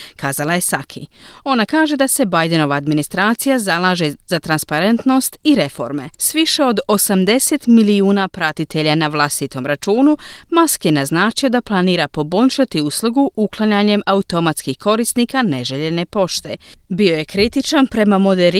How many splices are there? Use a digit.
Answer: 1